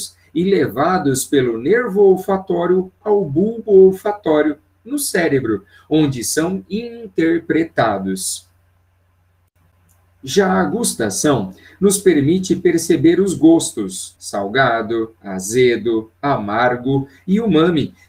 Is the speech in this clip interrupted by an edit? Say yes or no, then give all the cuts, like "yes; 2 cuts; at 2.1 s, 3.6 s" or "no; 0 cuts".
yes; 1 cut; at 14.2 s